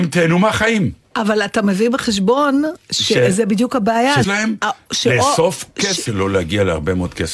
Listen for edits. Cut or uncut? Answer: cut